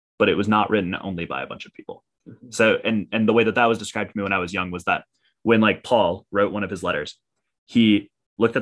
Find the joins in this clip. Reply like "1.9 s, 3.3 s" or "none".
2.2 s